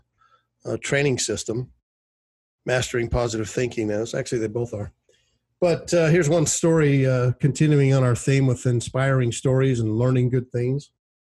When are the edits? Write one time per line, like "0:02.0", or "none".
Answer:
none